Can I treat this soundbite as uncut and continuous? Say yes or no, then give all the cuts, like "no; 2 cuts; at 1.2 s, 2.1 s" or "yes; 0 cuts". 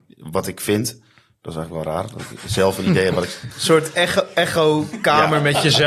yes; 0 cuts